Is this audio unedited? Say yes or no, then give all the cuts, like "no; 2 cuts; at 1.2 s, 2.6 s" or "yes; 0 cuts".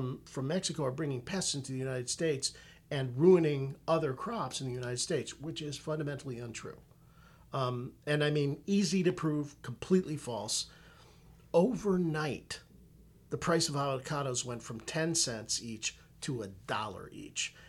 yes; 0 cuts